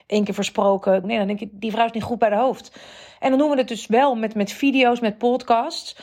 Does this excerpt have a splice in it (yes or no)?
yes